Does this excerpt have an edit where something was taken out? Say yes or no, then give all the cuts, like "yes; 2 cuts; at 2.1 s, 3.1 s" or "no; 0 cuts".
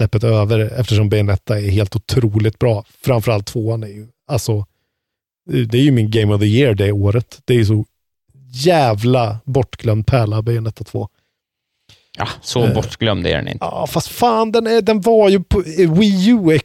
no; 0 cuts